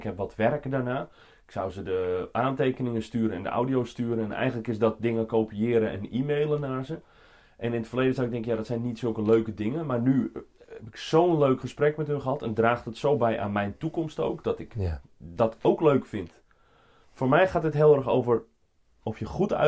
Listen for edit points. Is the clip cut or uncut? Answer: uncut